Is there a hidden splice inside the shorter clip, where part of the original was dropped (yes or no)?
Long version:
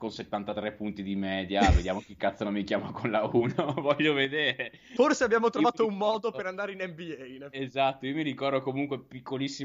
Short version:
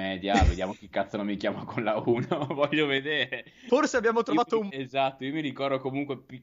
yes